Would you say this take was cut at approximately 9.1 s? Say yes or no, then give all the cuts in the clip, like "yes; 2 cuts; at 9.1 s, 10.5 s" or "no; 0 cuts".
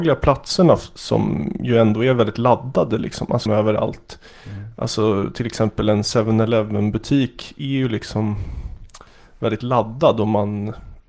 no; 1 cut; at 3.5 s